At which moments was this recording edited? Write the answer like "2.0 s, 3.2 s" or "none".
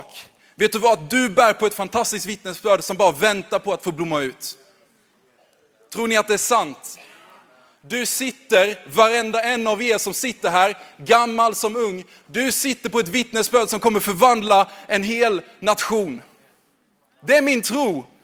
none